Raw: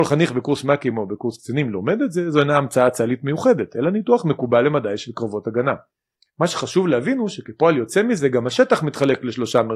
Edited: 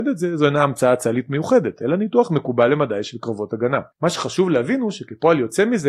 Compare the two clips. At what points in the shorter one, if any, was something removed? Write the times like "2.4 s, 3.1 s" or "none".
3.9 s